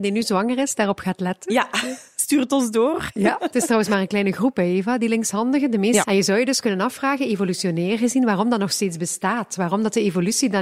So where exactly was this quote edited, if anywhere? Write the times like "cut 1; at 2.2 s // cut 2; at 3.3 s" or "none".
cut 1; at 6.0 s